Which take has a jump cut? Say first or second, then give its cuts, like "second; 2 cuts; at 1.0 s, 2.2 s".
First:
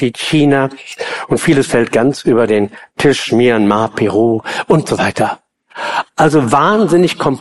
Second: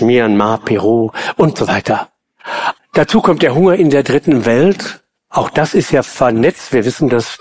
second; 1 cut; at 2.8 s